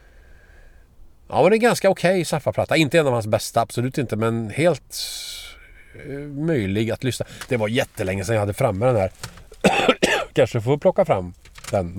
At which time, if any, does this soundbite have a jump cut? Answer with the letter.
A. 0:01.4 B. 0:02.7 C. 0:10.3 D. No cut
D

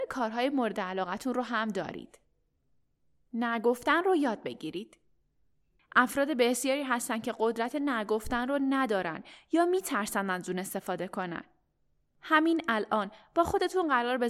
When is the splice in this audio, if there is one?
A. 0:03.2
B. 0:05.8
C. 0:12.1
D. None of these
B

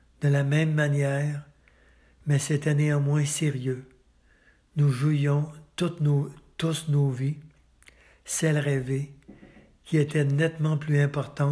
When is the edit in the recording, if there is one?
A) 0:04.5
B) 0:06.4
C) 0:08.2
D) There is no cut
D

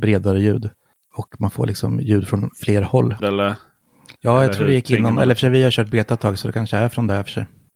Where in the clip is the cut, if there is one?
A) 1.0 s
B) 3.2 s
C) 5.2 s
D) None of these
B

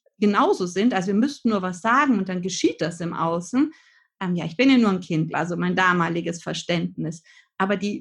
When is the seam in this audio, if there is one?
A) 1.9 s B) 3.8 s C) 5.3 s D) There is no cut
C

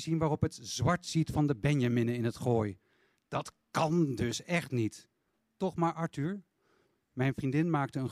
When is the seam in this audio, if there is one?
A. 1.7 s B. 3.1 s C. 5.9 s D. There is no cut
D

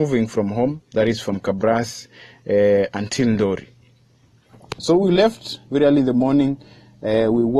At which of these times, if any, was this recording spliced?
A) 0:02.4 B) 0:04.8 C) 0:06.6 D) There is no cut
B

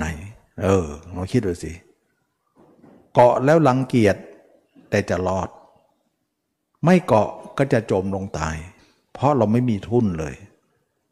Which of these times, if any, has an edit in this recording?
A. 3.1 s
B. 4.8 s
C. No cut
C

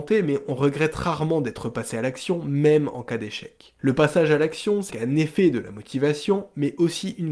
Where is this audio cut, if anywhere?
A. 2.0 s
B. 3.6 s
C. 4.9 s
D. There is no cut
C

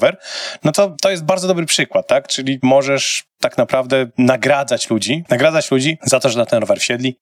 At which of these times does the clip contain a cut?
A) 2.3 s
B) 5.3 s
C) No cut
B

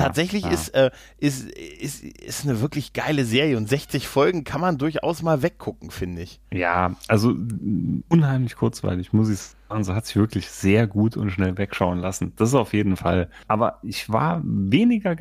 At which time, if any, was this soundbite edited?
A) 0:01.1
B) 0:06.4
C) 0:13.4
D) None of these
C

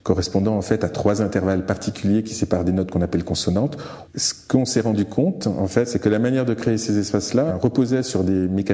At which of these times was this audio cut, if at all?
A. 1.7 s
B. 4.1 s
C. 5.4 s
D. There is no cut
B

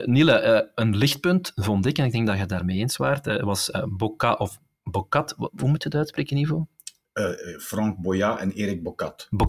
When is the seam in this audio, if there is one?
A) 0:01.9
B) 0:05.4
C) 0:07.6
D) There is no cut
D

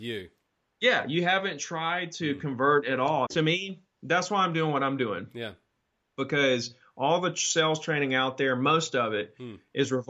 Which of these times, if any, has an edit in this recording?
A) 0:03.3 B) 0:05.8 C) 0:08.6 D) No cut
A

